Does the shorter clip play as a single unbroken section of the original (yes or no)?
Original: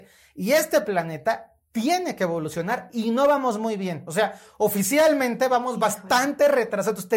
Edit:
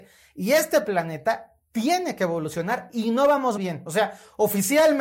no